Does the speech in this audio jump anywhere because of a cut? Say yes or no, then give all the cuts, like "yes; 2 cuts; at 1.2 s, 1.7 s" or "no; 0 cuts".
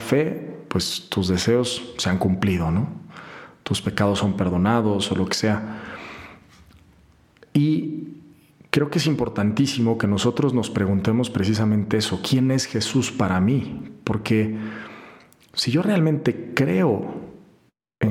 no; 0 cuts